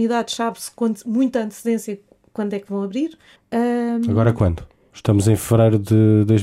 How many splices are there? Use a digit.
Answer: 1